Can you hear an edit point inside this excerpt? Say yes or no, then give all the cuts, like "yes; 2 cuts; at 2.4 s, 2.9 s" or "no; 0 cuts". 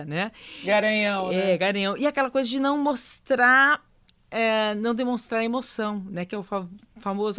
no; 0 cuts